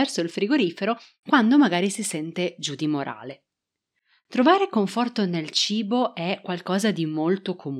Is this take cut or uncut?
uncut